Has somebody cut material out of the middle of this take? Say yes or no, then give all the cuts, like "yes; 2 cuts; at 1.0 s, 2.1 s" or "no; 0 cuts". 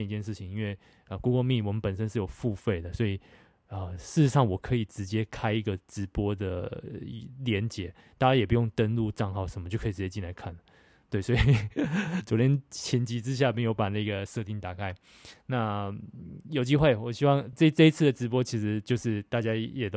no; 0 cuts